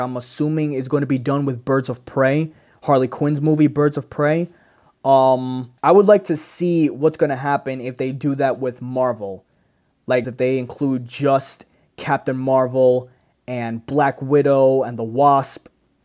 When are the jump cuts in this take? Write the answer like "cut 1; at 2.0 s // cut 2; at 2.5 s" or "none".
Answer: cut 1; at 5.8 s // cut 2; at 10.2 s